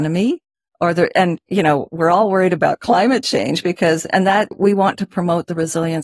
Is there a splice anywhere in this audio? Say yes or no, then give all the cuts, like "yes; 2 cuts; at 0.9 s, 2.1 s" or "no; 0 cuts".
yes; 1 cut; at 4.5 s